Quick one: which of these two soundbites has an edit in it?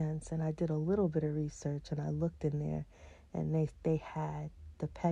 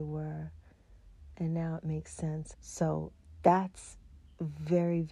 second; 2 cuts; at 1.3 s, 2.5 s

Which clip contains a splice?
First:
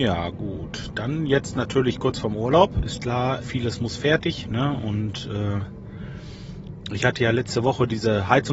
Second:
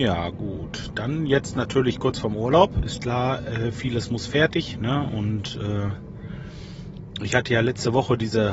first; 1 cut; at 3.4 s

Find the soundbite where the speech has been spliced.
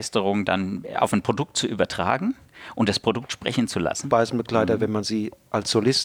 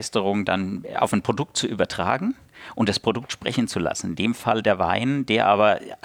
first; 1 cut; at 4.0 s

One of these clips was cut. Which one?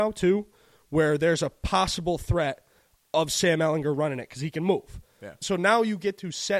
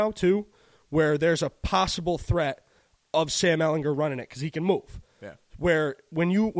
first; 1 cut; at 5.4 s

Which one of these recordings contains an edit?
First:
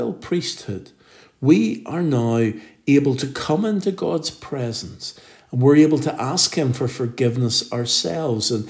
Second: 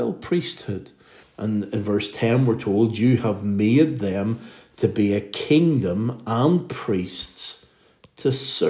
second; 1 cut; at 1.2 s

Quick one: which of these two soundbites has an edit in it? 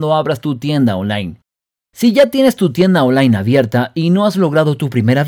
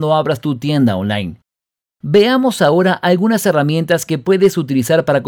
second; 1 cut; at 1.8 s

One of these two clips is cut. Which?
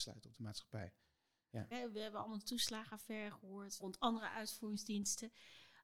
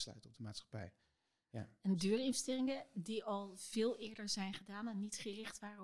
first; 2 cuts; at 1.7 s, 3.8 s

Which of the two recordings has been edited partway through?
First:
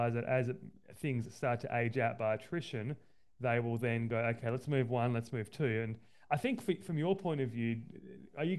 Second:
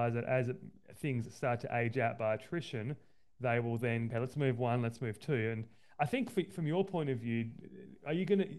second; 1 cut; at 4.1 s

